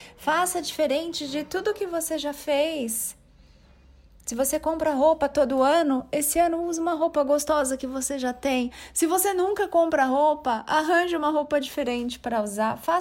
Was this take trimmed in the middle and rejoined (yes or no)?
no